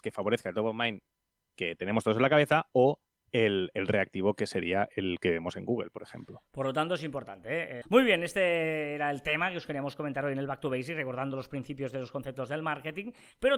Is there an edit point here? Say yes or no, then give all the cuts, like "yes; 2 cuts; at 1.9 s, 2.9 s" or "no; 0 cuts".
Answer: yes; 1 cut; at 7.8 s